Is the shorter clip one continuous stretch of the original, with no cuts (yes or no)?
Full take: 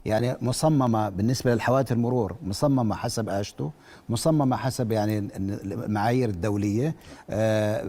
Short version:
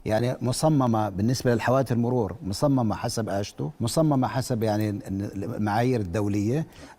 no